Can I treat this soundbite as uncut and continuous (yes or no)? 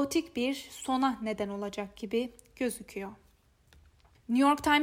yes